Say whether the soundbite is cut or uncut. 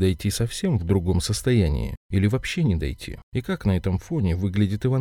cut